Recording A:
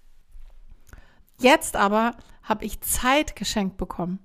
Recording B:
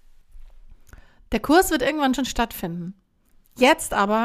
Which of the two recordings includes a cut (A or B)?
A